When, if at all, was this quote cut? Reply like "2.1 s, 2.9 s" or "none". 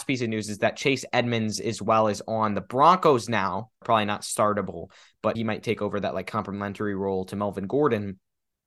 3.8 s, 5.4 s